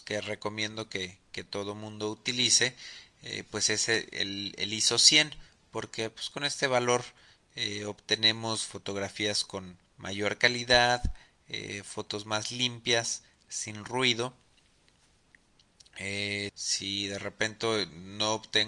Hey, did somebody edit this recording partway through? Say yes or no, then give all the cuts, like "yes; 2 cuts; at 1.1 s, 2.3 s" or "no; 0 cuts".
yes; 2 cuts; at 9.9 s, 16.5 s